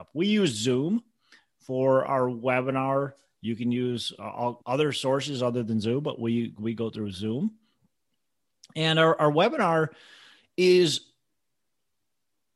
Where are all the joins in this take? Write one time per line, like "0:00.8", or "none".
0:04.6